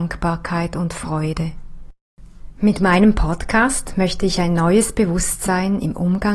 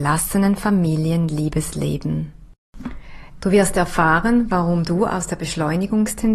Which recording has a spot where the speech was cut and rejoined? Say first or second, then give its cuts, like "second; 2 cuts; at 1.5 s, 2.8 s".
second; 1 cut; at 3.4 s